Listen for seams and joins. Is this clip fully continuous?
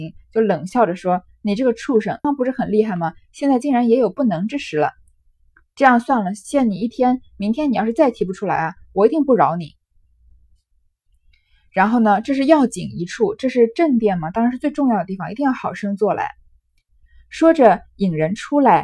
no; 1 cut; at 2.2 s

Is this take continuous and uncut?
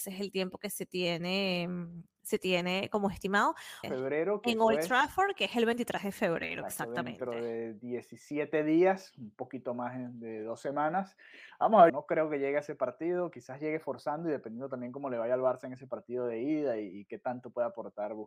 no; 2 cuts; at 3.8 s, 11.9 s

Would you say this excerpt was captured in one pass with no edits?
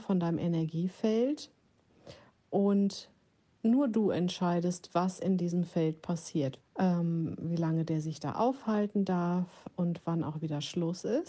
no; 1 cut; at 6.6 s

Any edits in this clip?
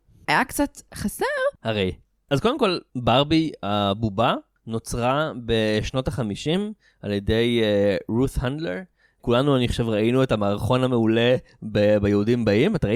yes; 1 cut; at 1.5 s

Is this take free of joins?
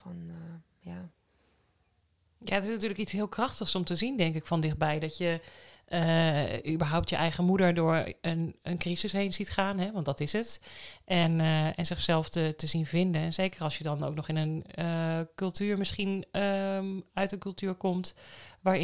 yes; 0 cuts

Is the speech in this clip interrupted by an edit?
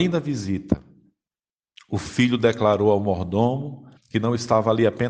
yes; 1 cut; at 4.0 s

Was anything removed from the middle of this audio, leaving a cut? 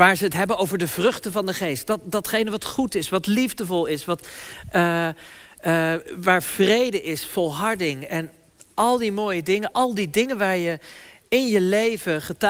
yes; 1 cut; at 9.7 s

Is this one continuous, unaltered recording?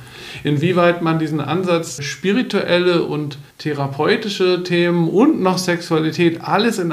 no; 2 cuts; at 2.0 s, 3.5 s

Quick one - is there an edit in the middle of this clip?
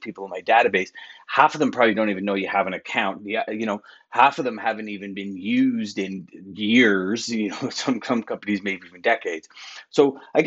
no; 0 cuts

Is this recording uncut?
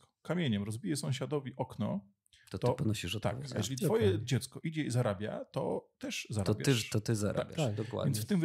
yes; 0 cuts

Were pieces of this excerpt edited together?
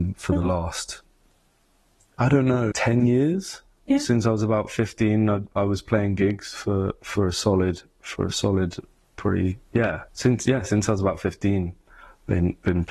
yes; 2 cuts; at 2.7 s, 10.1 s

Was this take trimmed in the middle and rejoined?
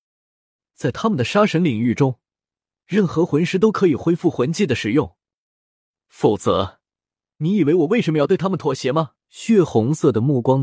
yes; 1 cut; at 9.2 s

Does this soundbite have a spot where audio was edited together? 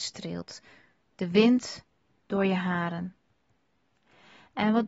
no; 0 cuts

